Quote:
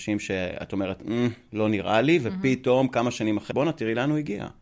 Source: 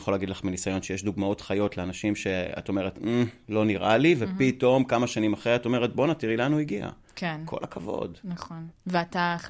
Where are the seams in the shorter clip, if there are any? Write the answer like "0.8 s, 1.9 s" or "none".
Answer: 3.5 s